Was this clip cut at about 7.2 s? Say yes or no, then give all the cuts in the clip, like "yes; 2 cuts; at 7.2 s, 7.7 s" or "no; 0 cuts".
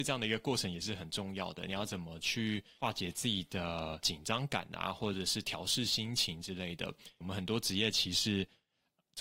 yes; 1 cut; at 7.2 s